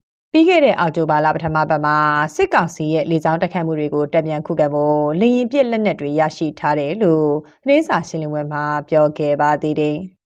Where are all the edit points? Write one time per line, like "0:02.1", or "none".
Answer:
none